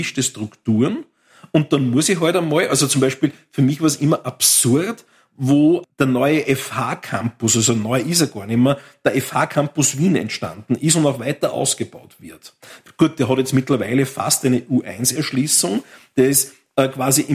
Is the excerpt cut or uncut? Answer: uncut